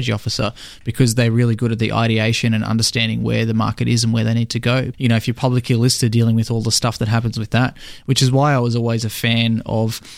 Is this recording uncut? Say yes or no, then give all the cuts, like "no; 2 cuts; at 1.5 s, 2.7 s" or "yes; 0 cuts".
no; 1 cut; at 4.9 s